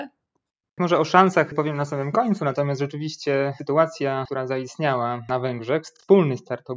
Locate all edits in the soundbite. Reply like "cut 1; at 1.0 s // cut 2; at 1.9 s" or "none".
none